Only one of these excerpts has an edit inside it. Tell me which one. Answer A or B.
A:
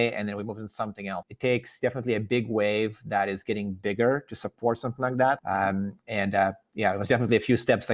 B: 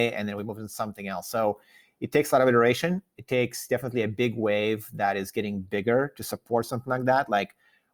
A